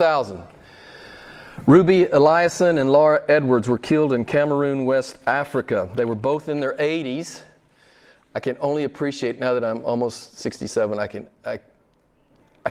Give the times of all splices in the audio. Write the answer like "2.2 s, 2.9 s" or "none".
none